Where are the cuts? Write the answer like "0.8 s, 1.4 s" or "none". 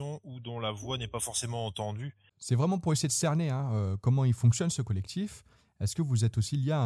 2.3 s